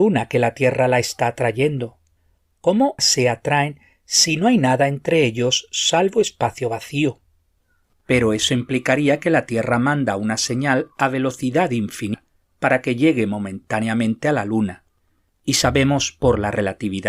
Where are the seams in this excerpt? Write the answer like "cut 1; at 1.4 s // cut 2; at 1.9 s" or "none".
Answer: cut 1; at 3.0 s // cut 2; at 7.9 s